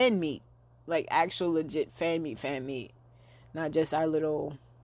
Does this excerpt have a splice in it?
no; 0 cuts

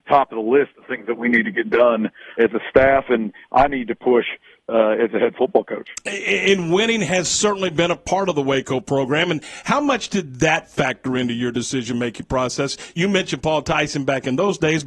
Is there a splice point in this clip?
yes; 1 cut; at 2.4 s

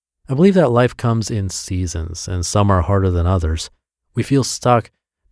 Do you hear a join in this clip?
yes; 1 cut; at 4.0 s

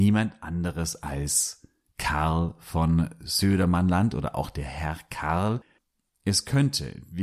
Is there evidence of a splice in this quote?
no; 0 cuts

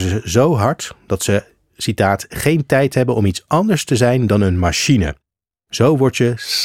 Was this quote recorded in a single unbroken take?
yes; 0 cuts

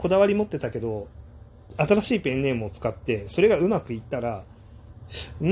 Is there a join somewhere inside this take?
no; 0 cuts

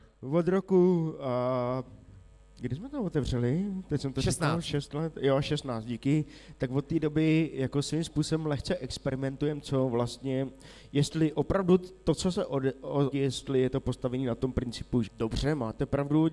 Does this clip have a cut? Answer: yes; 2 cuts; at 13.1 s, 15.0 s

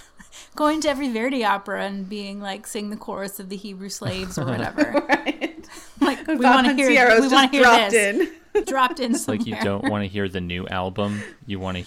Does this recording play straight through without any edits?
no; 1 cut; at 8.6 s

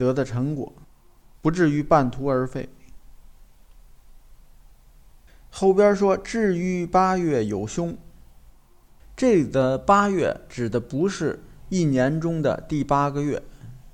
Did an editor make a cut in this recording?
no; 0 cuts

